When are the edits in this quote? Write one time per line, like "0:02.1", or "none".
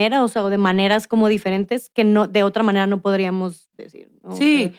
none